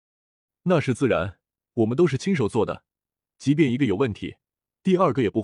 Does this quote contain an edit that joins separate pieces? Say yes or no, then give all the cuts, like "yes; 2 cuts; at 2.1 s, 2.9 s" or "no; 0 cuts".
no; 0 cuts